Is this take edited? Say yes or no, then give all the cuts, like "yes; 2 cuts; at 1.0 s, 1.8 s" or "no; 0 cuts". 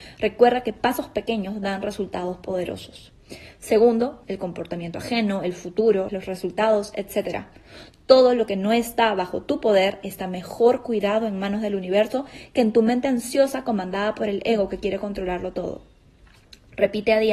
yes; 2 cuts; at 4.2 s, 6.1 s